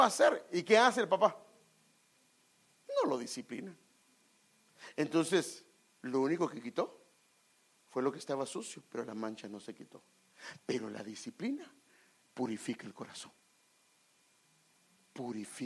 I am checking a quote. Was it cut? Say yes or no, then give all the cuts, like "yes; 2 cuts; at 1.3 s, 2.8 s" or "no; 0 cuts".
no; 0 cuts